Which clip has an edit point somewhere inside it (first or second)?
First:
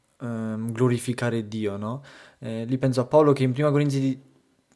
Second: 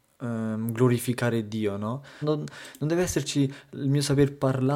second